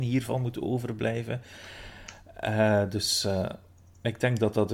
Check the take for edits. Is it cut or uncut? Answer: uncut